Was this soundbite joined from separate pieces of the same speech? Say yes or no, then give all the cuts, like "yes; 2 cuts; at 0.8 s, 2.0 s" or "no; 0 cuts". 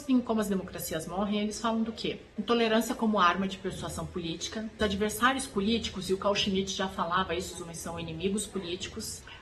yes; 1 cut; at 7.5 s